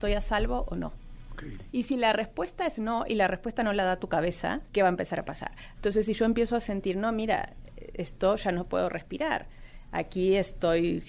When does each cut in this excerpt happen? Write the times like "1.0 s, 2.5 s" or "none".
1.7 s, 4.7 s, 5.7 s